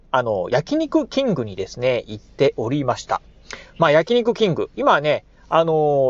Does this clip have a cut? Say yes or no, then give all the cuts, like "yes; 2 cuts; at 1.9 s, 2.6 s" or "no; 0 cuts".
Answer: no; 0 cuts